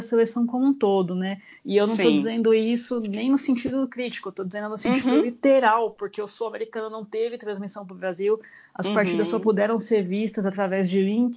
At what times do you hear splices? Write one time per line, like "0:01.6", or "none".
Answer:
none